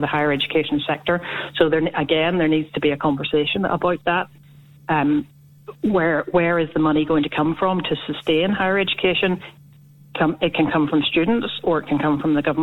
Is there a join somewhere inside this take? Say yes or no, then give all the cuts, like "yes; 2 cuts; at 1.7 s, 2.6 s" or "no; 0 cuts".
no; 0 cuts